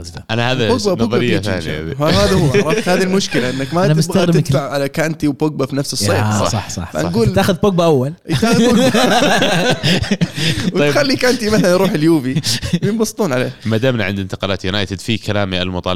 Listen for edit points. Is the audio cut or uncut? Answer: uncut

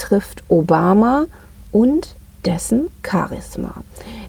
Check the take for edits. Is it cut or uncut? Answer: uncut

